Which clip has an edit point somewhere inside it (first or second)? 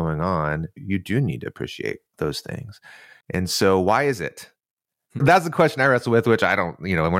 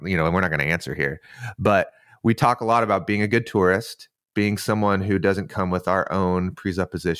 first